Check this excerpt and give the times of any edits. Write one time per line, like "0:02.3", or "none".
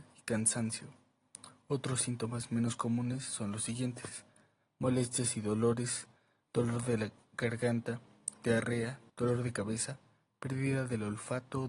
0:09.1